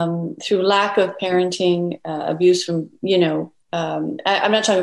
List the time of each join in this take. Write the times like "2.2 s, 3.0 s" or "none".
none